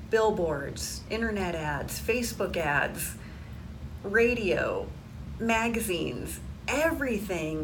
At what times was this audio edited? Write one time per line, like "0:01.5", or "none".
0:01.1